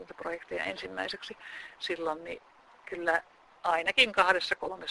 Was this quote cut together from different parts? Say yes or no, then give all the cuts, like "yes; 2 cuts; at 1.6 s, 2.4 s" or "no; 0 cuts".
no; 0 cuts